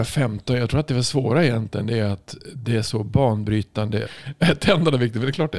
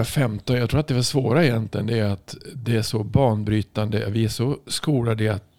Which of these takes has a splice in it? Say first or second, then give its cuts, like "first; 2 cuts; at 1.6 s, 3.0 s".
first; 1 cut; at 4.1 s